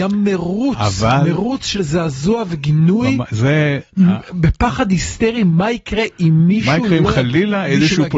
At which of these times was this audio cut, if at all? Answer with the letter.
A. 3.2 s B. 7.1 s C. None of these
C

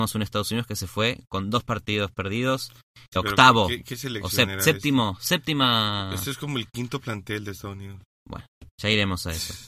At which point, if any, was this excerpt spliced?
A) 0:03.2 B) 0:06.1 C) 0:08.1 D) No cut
A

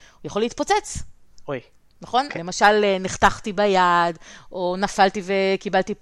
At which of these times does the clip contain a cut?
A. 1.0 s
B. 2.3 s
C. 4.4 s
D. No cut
B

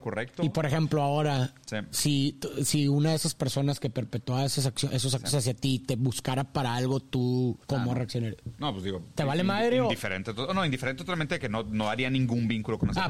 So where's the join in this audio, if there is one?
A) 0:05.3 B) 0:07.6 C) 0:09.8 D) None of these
B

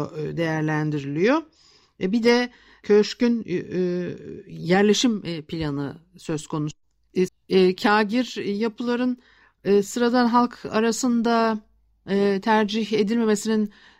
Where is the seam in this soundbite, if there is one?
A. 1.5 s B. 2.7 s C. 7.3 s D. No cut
C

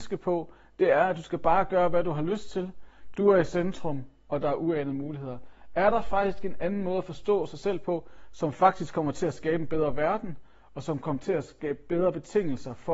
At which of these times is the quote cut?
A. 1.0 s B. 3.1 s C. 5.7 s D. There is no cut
B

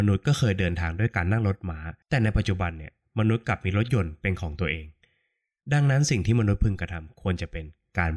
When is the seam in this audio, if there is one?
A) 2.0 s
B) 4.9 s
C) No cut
A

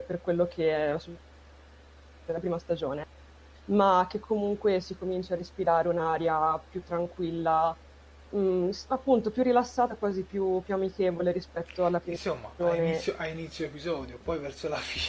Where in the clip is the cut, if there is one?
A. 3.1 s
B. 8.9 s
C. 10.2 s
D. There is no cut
D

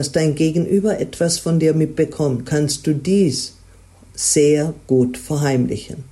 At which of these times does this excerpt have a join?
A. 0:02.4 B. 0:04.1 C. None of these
A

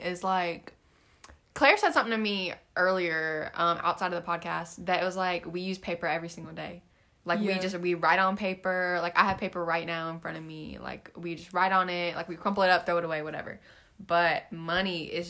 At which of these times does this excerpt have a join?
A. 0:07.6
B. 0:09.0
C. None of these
C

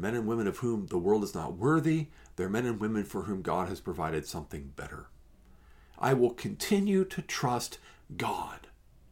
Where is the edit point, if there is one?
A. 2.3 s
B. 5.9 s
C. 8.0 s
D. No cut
B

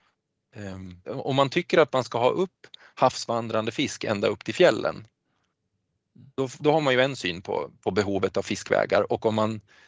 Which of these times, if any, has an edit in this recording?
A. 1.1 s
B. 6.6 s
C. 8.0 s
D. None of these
A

